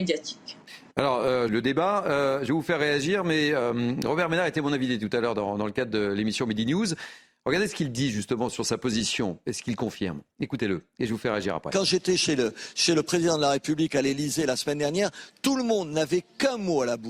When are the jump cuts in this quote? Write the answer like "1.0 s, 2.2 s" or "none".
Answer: 1.5 s